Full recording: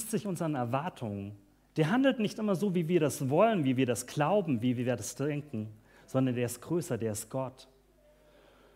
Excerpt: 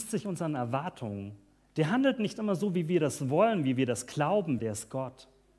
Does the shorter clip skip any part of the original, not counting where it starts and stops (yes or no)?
yes